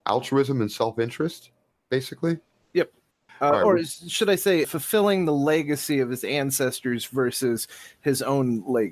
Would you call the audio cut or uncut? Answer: cut